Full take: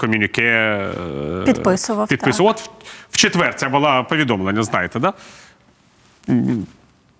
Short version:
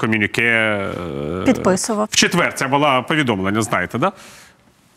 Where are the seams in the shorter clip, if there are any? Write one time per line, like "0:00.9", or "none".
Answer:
0:02.1

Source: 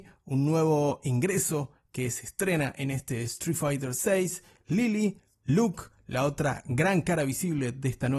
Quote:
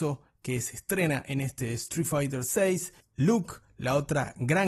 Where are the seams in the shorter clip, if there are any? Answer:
0:03.0

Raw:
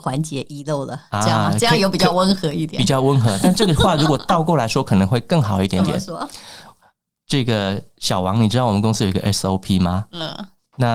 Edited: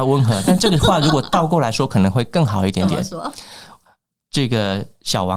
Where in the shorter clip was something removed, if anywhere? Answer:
none

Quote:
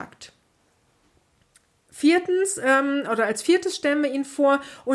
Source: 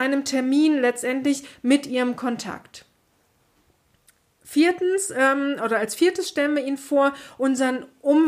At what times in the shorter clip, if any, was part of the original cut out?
none

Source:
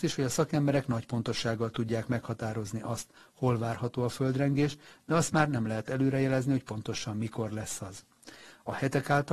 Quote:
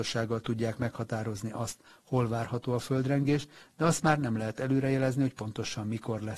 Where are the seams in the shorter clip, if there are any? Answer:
none

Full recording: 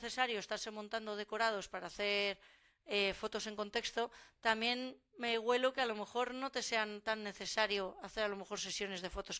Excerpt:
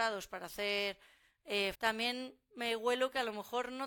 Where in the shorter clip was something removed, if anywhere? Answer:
0:01.7

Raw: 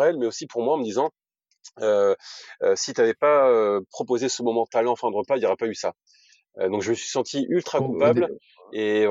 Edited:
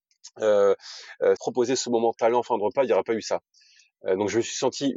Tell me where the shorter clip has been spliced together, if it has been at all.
0:01.4

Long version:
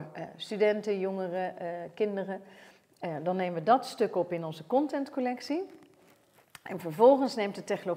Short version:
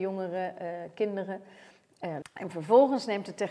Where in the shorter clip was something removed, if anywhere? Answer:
0:02.2

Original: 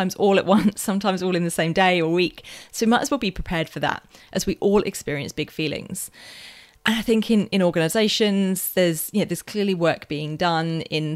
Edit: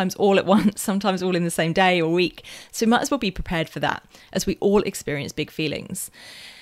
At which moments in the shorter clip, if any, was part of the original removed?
none

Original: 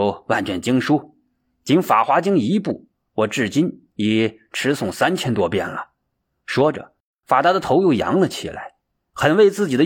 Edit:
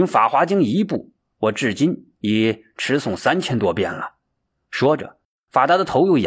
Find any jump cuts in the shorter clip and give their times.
none

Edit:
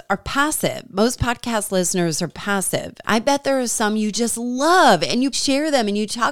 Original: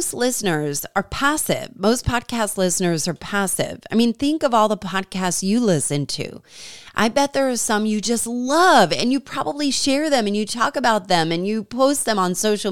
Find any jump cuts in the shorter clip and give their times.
0:03.0
0:05.3

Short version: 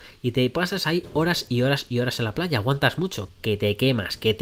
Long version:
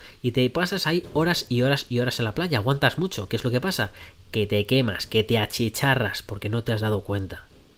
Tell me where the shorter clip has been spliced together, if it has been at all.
0:03.3

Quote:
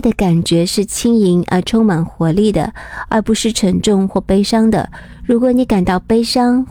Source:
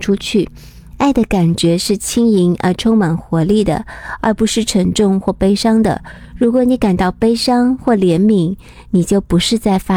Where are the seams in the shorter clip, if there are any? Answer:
none

